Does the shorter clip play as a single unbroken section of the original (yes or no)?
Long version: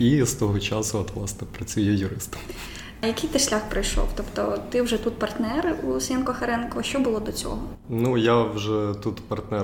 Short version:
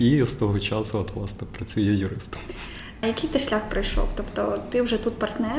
yes